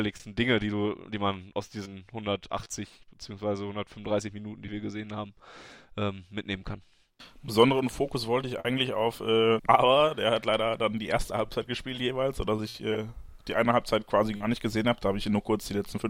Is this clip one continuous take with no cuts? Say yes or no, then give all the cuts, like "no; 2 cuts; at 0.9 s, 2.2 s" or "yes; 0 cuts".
no; 1 cut; at 9.6 s